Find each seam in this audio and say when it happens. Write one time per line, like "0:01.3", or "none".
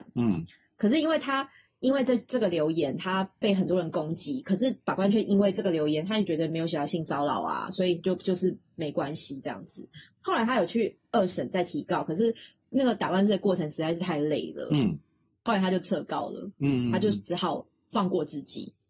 none